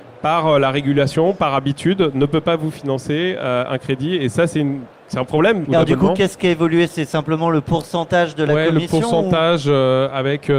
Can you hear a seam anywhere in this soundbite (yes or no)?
yes